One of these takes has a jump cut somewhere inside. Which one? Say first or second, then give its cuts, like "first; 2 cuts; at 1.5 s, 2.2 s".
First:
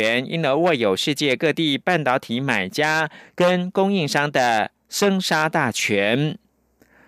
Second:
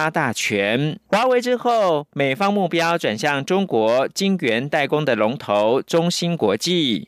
second; 1 cut; at 1.0 s